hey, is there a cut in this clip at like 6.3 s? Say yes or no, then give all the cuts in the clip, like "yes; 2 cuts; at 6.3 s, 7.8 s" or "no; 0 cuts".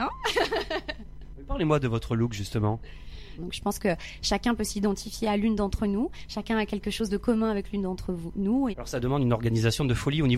no; 2 cuts; at 3.4 s, 8.7 s